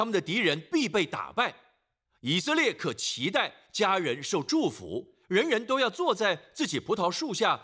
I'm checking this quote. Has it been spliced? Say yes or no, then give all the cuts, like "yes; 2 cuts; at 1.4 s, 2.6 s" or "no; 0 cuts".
no; 0 cuts